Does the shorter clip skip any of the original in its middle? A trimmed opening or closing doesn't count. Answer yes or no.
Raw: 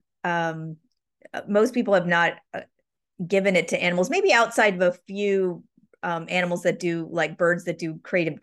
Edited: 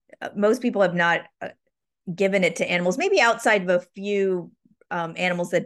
no